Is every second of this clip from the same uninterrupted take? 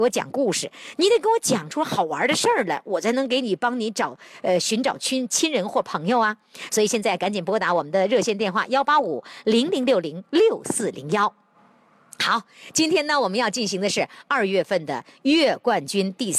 yes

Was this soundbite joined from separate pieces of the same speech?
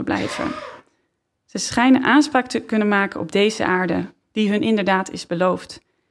no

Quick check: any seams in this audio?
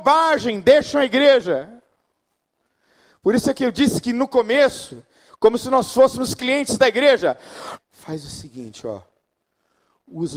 yes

